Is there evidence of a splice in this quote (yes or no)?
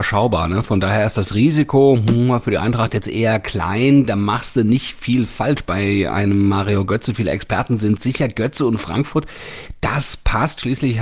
no